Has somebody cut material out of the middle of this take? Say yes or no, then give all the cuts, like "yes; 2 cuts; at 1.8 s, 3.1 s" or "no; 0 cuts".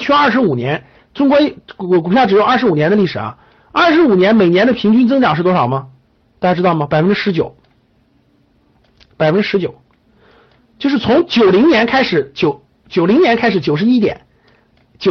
no; 0 cuts